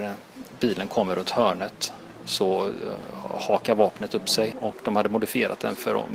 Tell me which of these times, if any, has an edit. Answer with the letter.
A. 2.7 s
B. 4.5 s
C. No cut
B